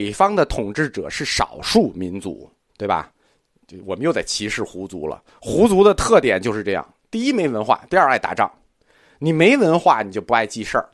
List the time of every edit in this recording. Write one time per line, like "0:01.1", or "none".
0:02.7